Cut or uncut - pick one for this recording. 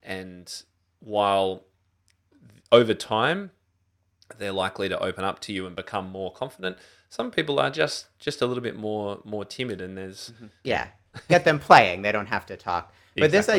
cut